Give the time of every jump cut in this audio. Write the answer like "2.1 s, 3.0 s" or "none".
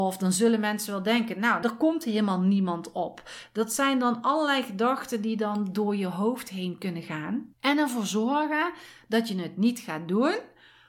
1.6 s